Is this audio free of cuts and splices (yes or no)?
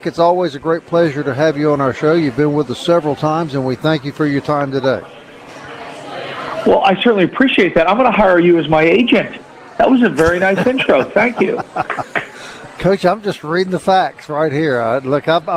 yes